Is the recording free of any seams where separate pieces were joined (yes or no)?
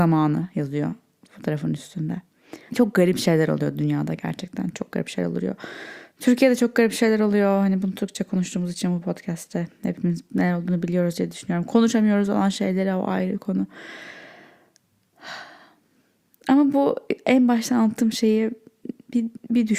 no